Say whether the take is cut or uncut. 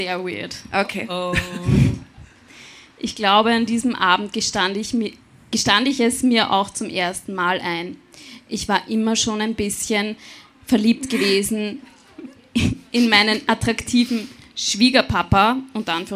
uncut